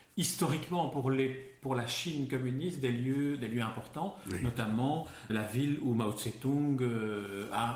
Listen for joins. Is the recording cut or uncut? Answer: cut